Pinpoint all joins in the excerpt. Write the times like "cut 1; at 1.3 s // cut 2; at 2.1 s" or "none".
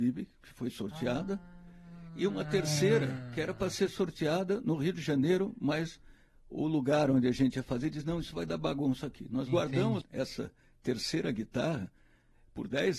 cut 1; at 10.0 s